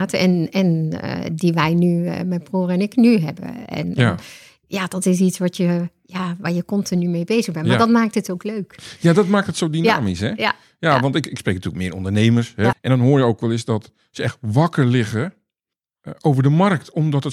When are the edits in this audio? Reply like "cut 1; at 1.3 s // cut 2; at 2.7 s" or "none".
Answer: cut 1; at 12.7 s

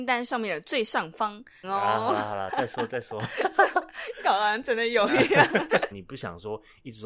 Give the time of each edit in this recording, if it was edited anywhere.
cut 1; at 1.6 s // cut 2; at 5.9 s

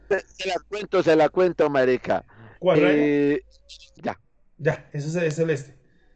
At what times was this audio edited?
cut 1; at 2.8 s // cut 2; at 4.0 s

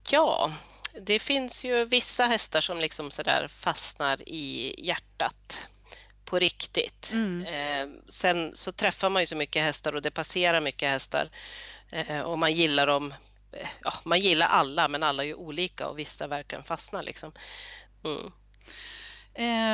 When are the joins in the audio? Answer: cut 1; at 17.9 s

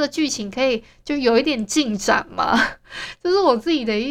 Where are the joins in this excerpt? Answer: none

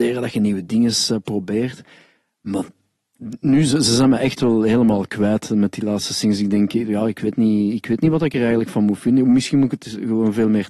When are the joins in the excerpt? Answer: none

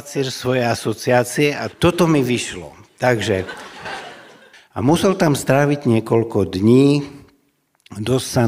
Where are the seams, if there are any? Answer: cut 1; at 1.7 s // cut 2; at 4.5 s

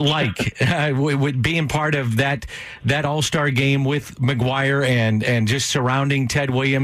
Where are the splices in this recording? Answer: none

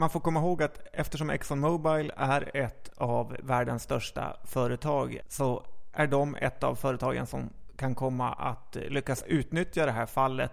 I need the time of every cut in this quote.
cut 1; at 5.2 s

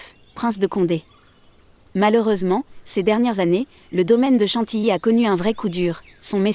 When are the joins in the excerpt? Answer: none

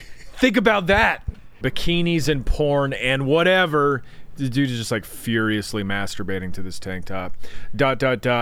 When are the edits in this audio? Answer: cut 1; at 1.6 s

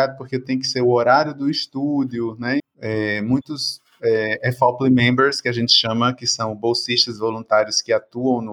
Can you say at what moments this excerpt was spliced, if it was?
cut 1; at 2.6 s

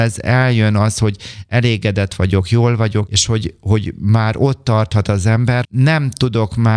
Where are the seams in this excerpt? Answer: cut 1; at 3.1 s // cut 2; at 5.6 s

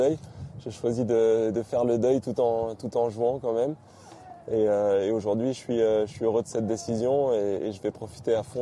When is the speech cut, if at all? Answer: none

